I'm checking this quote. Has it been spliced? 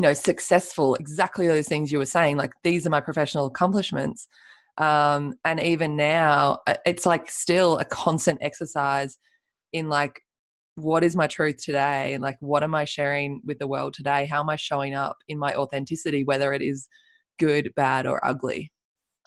no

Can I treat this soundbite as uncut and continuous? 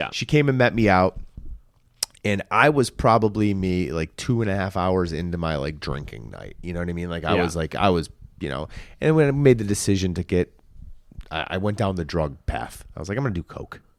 yes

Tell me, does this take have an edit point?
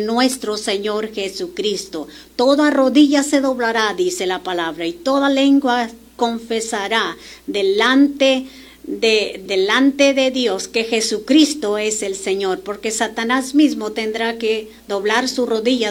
yes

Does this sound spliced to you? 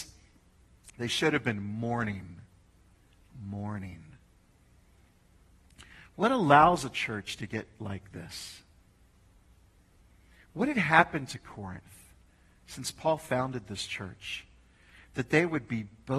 no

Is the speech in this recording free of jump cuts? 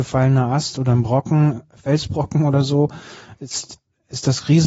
yes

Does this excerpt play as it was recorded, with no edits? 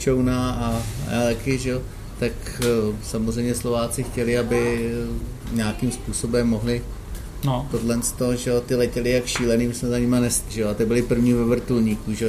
no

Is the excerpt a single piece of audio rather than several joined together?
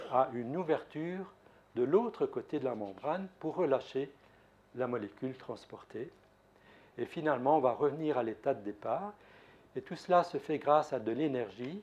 yes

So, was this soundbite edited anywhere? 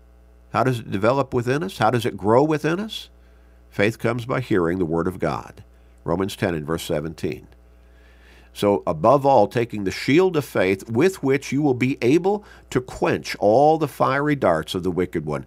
no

